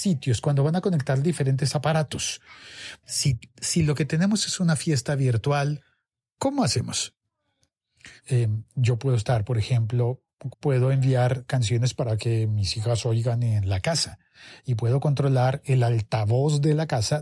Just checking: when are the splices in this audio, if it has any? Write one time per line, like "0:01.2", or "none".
0:03.0
0:08.2
0:10.5